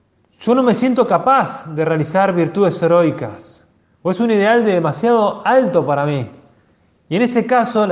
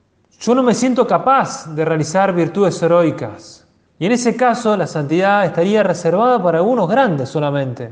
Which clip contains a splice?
second; 1 cut; at 3.9 s

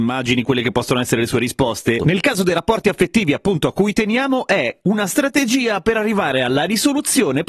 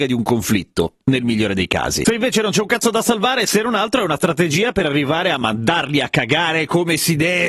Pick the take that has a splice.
first; 1 cut; at 2.0 s

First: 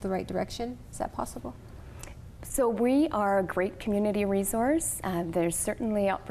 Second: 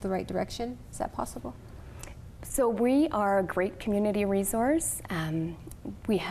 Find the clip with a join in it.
second; 1 cut; at 5.0 s

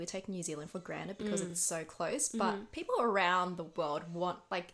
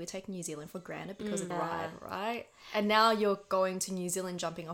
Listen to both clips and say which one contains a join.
second; 1 cut; at 1.5 s

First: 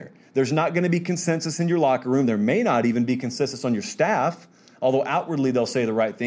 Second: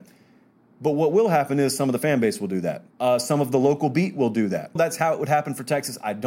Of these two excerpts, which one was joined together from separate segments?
second; 2 cuts; at 2.9 s, 4.8 s

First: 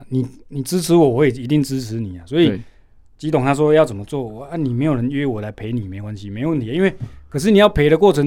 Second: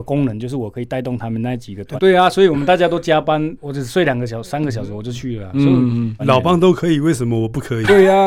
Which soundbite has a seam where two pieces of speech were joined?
second; 3 cuts; at 2.0 s, 3.6 s, 6.2 s

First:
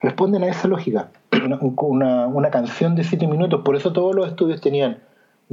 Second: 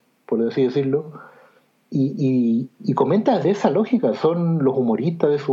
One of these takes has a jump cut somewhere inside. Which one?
first; 1 cut; at 1.4 s

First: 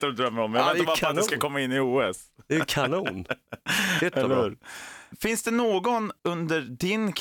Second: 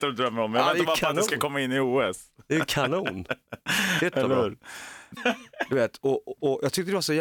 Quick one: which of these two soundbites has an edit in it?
second; 1 cut; at 5.2 s

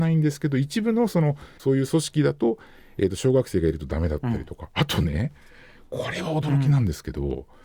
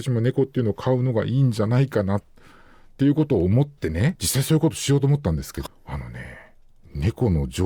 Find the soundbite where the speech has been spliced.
second; 2 cuts; at 4.2 s, 5.7 s

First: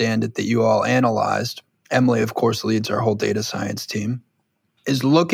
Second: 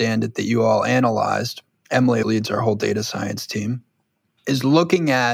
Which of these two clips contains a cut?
second; 1 cut; at 2.2 s

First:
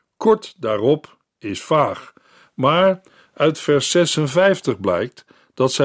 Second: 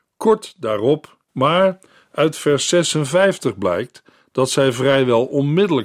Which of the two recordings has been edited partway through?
second; 1 cut; at 1.3 s

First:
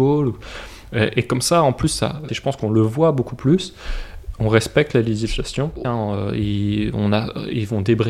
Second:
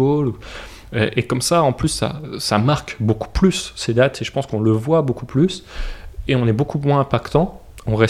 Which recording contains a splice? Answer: first; 3 cuts; at 2.3 s, 4.3 s, 5.8 s

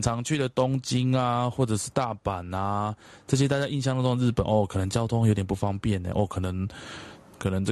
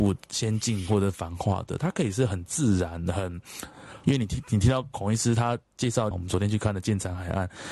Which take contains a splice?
second; 2 cuts; at 4.0 s, 6.1 s

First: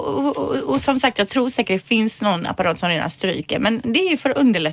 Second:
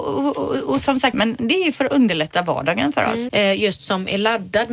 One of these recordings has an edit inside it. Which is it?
second; 2 cuts; at 1.1 s, 3.3 s

